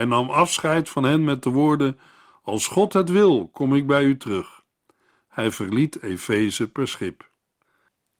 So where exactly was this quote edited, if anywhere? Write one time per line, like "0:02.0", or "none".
none